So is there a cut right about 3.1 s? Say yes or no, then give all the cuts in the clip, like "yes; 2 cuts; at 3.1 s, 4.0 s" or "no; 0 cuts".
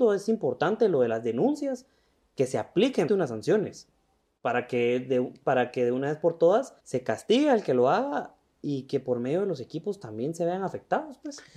yes; 2 cuts; at 3.1 s, 6.8 s